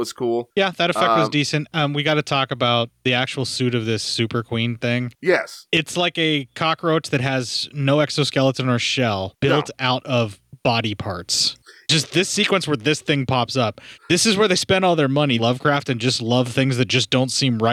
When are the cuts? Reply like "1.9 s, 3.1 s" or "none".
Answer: 11.8 s, 15.4 s